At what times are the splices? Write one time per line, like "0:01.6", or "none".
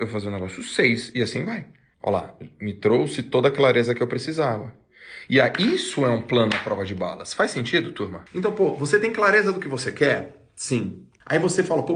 none